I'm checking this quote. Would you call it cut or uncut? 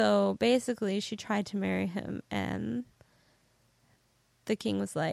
uncut